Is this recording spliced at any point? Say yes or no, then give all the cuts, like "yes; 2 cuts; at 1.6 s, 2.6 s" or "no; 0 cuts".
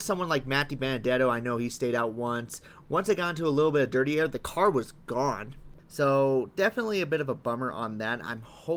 yes; 2 cuts; at 2.8 s, 5.8 s